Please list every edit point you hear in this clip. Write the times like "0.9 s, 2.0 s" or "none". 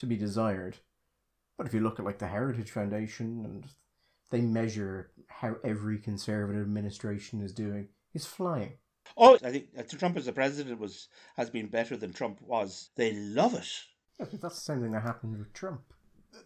9.4 s, 12.9 s

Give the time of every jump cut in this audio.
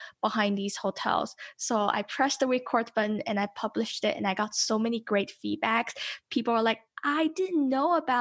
none

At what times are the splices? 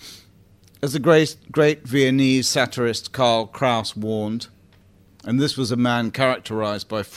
none

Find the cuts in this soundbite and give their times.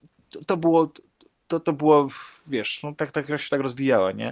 3.0 s

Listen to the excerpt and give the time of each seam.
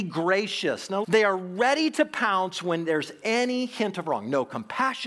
1.0 s

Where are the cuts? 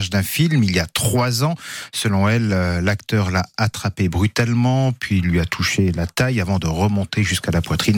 none

